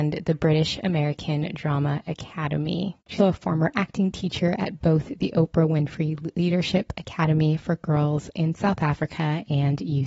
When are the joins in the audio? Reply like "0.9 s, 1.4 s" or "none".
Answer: 3.2 s